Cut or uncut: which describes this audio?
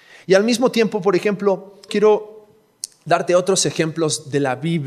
cut